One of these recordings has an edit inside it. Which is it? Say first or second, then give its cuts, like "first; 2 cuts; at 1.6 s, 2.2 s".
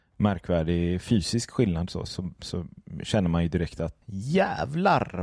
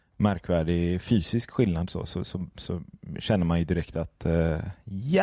first; 2 cuts; at 2.1 s, 4.0 s